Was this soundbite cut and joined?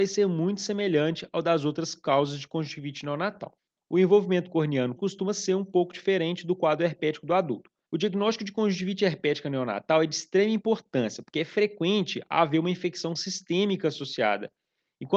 yes; 2 cuts; at 5.0 s, 7.9 s

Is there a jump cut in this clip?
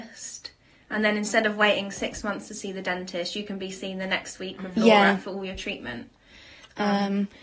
no; 0 cuts

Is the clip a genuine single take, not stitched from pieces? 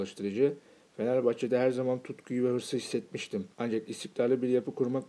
no; 1 cut; at 3.5 s

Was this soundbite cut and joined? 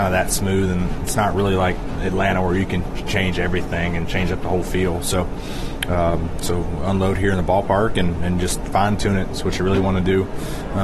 no; 0 cuts

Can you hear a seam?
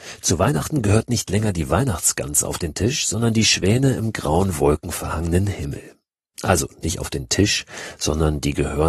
no; 0 cuts

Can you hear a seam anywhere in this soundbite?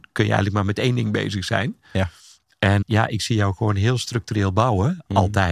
yes; 1 cut; at 2.8 s

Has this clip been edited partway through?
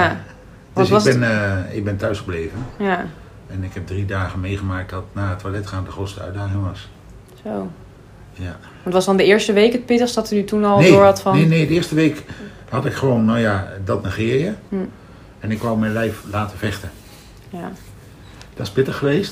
yes; 1 cut; at 14.7 s

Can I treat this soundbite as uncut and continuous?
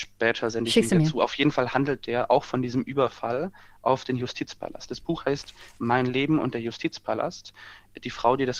yes; 0 cuts

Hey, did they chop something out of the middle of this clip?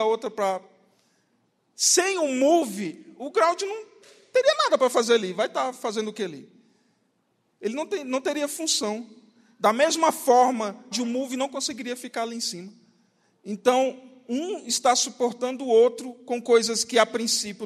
yes; 1 cut; at 10.9 s

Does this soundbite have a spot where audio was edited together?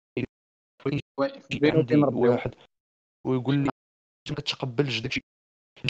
no; 0 cuts

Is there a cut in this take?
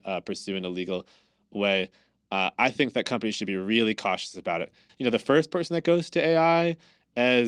yes; 1 cut; at 4.9 s

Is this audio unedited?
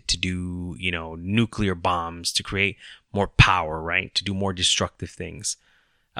yes; 0 cuts

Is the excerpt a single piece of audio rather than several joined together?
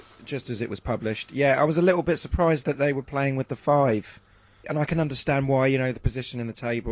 no; 1 cut; at 4.6 s

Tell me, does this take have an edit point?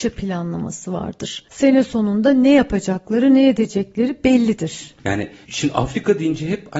yes; 1 cut; at 5.0 s

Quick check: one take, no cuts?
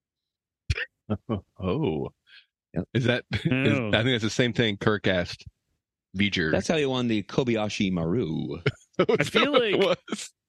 yes; 0 cuts

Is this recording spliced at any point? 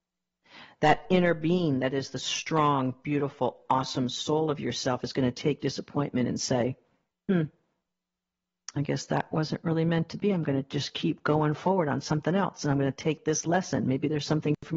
no; 0 cuts

